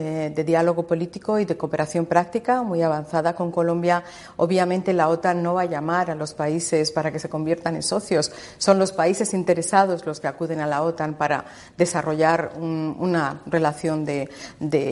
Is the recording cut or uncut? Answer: uncut